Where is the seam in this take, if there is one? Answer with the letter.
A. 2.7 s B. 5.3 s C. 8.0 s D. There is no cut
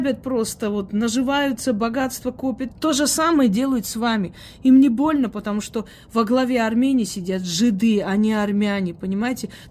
A